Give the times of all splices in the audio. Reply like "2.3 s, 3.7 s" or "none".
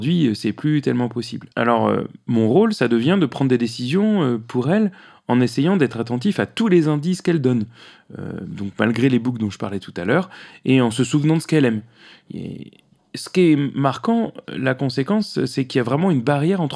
1.5 s